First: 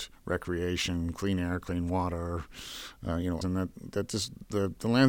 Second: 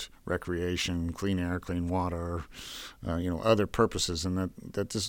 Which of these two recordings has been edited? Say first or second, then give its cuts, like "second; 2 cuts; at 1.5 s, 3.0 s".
first; 1 cut; at 3.4 s